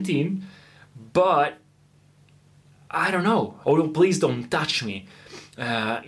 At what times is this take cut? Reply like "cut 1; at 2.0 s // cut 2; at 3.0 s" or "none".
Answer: cut 1; at 3.6 s

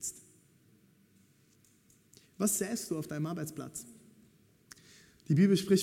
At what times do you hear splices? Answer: none

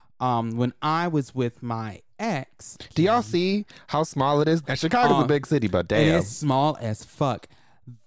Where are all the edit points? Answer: cut 1; at 4.6 s

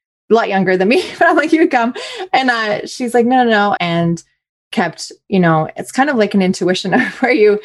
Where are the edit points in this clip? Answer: cut 1; at 3.8 s

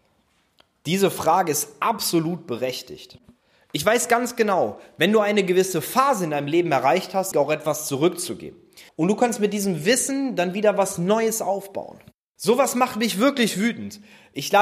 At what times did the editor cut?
cut 1; at 7.3 s // cut 2; at 8.9 s // cut 3; at 12.4 s

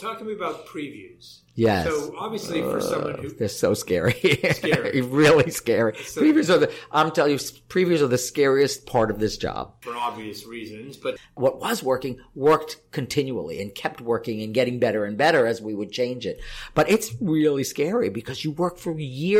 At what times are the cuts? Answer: cut 1; at 11.2 s

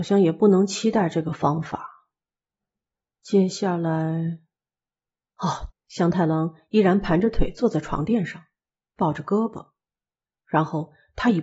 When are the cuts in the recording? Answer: cut 1; at 5.7 s

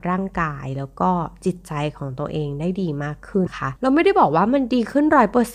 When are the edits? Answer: cut 1; at 3.5 s

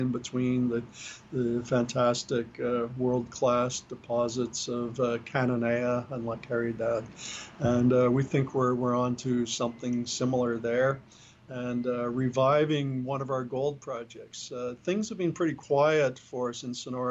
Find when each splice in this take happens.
none

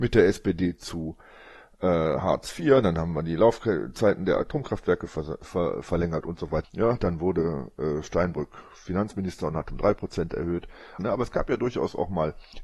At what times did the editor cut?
cut 1; at 6.6 s // cut 2; at 11.0 s

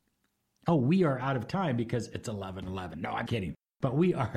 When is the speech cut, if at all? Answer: cut 1; at 3.3 s

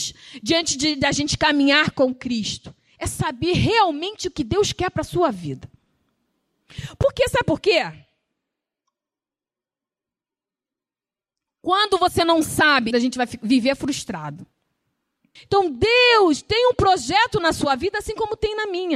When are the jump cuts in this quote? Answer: cut 1; at 12.9 s // cut 2; at 15.4 s

